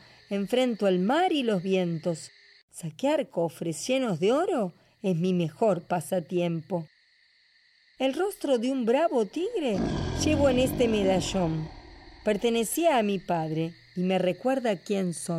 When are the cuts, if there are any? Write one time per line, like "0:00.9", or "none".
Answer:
none

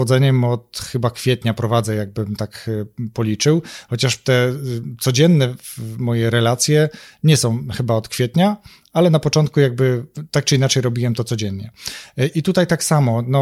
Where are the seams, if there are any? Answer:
0:12.3

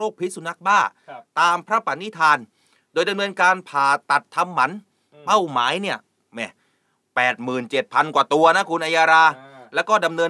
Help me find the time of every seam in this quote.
none

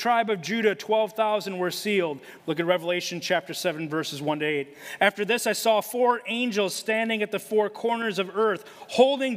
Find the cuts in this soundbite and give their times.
0:02.4

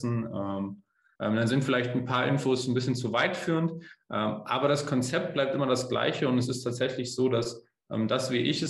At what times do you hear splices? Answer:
0:01.1

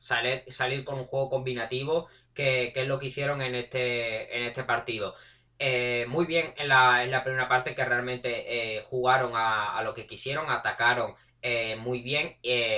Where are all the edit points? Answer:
none

